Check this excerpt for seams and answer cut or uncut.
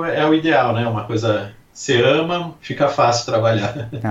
cut